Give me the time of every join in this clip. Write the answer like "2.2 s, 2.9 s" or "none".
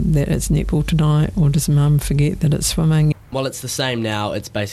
3.1 s